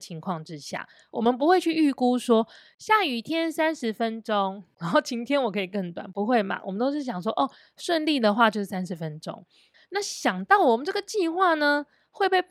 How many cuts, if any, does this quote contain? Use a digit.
1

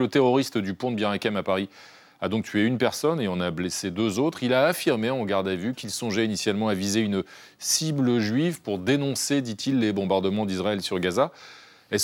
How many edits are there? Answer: 0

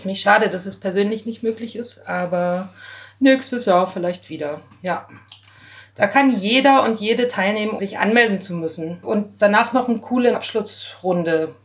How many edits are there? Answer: 3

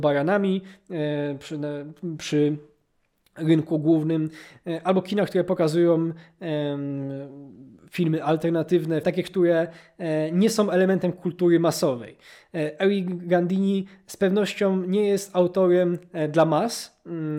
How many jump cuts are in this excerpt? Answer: 1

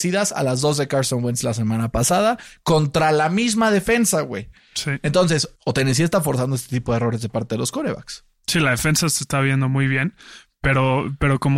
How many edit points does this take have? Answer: 1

